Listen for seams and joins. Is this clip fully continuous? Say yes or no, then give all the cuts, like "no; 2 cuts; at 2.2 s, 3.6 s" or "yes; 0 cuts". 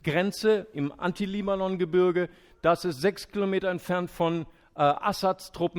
yes; 0 cuts